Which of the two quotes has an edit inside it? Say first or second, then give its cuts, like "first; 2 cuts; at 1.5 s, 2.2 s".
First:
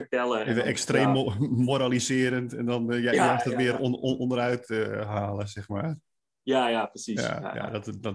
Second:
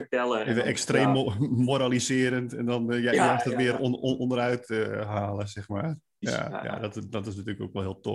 second; 1 cut; at 6.2 s